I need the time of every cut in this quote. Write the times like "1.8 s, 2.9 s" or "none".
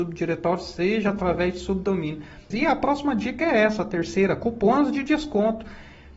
2.5 s